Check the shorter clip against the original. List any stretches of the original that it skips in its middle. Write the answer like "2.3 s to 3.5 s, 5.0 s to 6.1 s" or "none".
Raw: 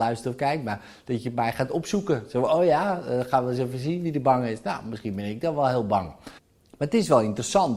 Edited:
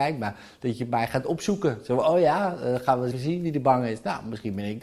3.6 s to 3.7 s